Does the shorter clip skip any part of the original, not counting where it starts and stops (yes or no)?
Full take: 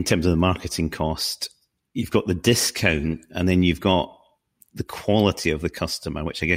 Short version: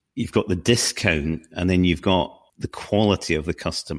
yes